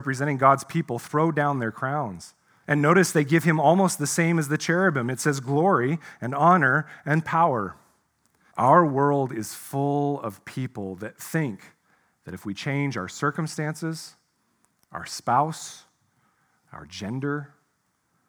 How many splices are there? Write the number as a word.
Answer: two